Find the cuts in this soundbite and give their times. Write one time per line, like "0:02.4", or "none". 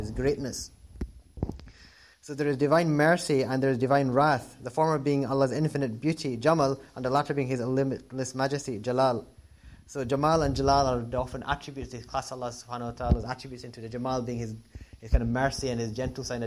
0:02.1